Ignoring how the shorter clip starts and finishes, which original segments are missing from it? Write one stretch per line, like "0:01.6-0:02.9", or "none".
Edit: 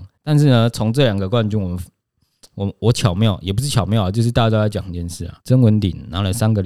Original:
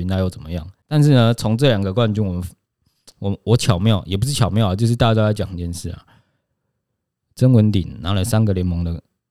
0:06.0-0:07.3